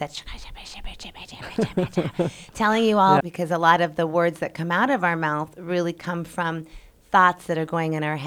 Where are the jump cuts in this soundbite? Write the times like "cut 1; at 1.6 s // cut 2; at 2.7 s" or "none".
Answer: cut 1; at 3.2 s